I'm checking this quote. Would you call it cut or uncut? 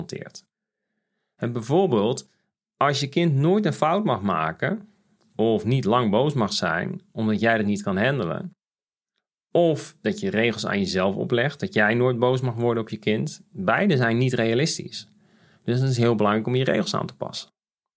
uncut